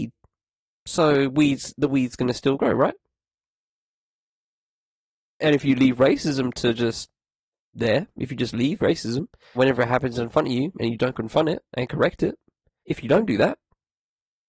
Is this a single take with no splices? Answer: no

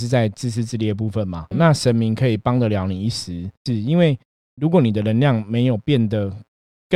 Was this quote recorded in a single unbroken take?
no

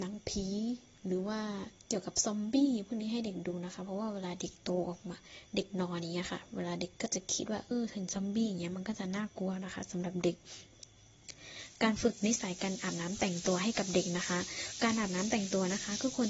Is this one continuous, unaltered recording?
no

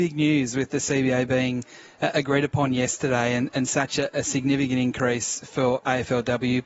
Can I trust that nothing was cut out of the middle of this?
yes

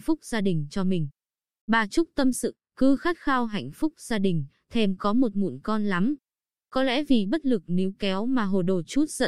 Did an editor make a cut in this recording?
no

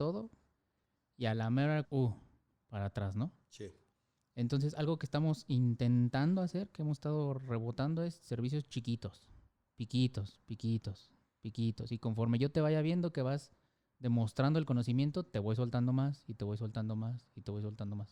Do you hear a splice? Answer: yes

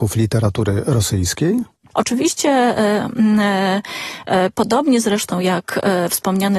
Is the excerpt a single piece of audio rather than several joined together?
no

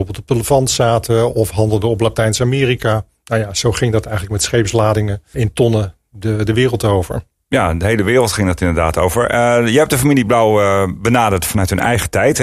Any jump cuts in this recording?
yes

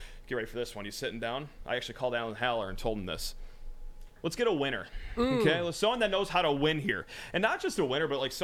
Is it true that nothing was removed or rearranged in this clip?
yes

